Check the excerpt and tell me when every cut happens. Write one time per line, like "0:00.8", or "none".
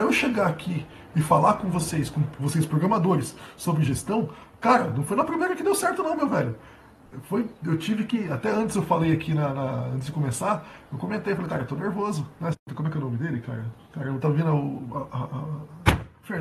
0:12.5